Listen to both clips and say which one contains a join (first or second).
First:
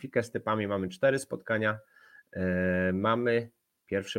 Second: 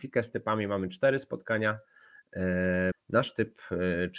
second